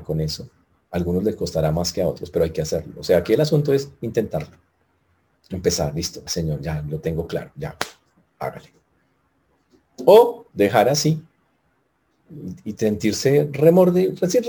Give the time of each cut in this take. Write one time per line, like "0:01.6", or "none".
0:06.3